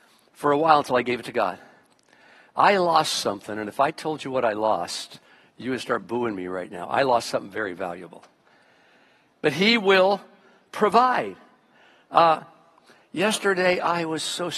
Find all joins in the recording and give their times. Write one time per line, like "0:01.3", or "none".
0:09.3